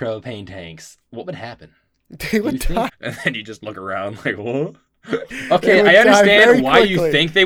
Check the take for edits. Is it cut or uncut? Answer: cut